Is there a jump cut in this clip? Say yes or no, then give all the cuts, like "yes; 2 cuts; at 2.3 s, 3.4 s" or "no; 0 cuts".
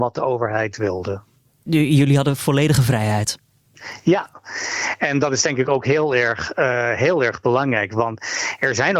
no; 0 cuts